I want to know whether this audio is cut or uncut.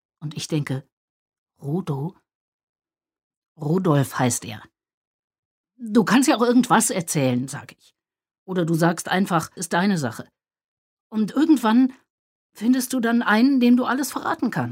cut